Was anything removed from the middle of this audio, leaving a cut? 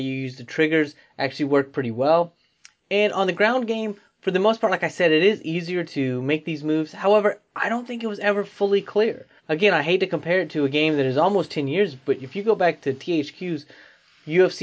yes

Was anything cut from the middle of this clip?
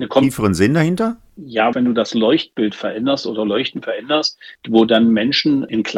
yes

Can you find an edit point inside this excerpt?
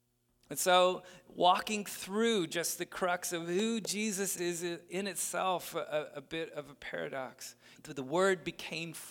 yes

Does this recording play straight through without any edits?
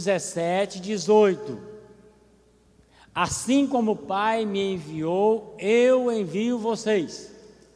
yes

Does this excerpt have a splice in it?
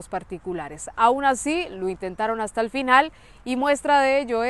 no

